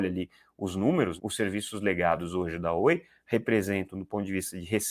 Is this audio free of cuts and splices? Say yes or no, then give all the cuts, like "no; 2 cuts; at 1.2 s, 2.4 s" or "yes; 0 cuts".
no; 1 cut; at 1.2 s